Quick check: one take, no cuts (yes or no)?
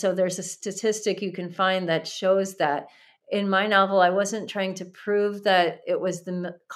yes